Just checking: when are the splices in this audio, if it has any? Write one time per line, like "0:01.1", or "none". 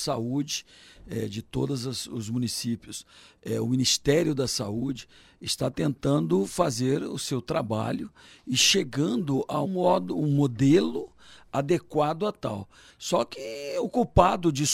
0:09.6
0:12.9